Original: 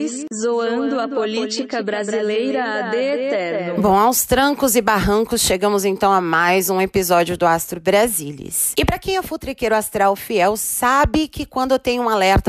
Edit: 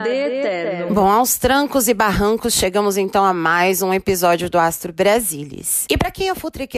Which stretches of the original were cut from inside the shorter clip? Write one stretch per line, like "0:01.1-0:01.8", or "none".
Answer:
none